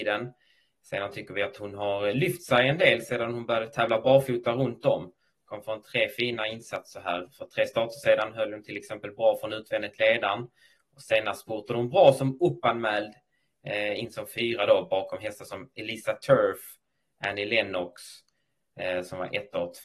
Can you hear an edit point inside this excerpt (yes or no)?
no